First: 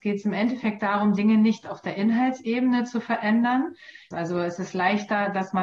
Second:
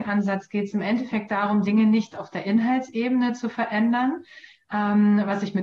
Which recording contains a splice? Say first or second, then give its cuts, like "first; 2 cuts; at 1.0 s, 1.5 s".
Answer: first; 1 cut; at 4.1 s